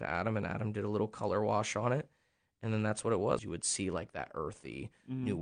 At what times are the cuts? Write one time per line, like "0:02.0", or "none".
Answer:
0:03.4